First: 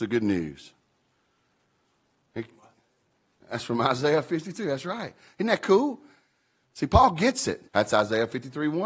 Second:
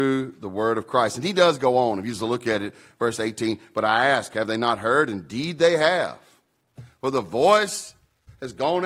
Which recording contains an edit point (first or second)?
first